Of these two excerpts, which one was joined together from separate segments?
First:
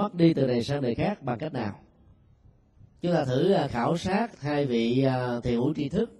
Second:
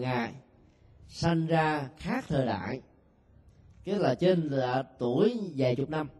first; 1 cut; at 4.3 s

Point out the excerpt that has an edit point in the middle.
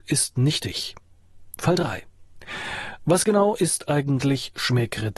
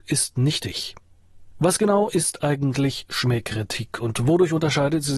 second; 1 cut; at 1.5 s

